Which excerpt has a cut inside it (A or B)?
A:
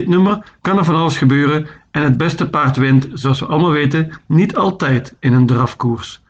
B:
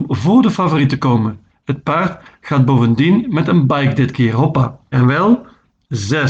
B